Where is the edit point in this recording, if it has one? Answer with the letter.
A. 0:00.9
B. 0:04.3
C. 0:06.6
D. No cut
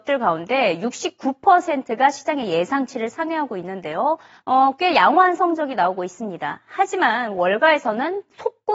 B